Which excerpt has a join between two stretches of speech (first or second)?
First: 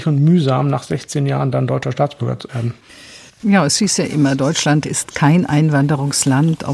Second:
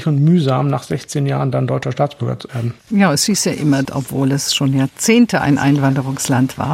second